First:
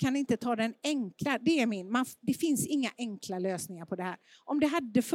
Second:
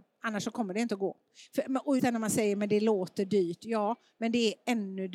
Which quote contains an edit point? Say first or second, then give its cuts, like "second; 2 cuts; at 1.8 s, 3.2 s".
second; 1 cut; at 2.0 s